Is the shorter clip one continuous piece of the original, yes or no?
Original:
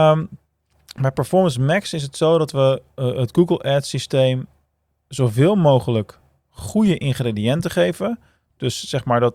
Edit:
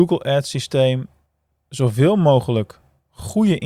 yes